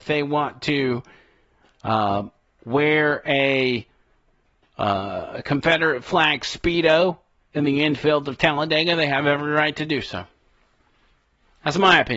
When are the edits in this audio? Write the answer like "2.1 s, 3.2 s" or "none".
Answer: none